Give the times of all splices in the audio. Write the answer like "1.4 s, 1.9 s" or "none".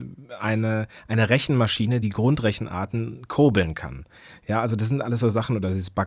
2.0 s